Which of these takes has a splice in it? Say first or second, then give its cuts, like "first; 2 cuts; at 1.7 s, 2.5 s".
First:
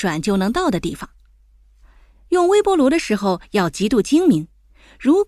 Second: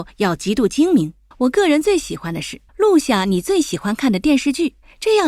second; 2 cuts; at 1.3 s, 2.7 s